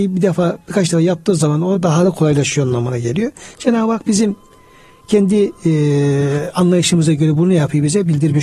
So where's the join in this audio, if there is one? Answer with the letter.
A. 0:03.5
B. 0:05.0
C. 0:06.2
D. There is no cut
D